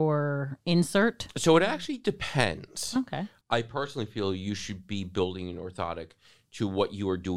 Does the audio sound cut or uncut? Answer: cut